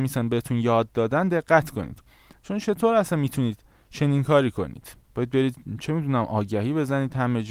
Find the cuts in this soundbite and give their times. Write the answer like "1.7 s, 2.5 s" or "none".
5.0 s